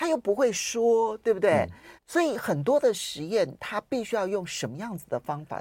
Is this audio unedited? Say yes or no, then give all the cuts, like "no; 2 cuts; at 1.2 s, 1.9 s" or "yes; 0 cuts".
no; 1 cut; at 2.0 s